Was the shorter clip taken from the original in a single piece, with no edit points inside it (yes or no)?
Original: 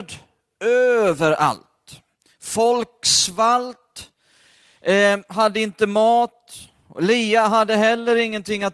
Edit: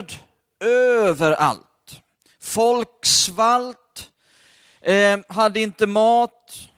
yes